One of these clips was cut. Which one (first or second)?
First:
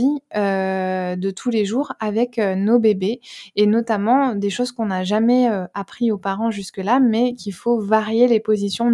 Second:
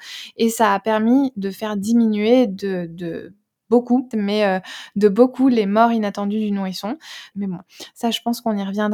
second